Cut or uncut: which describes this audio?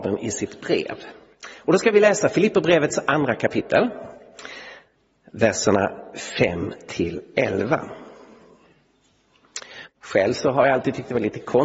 cut